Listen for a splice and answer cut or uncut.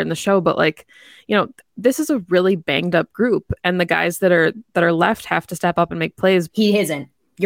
cut